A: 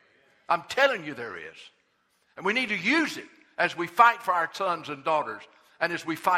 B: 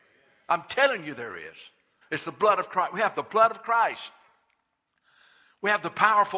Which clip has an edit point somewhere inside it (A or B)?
B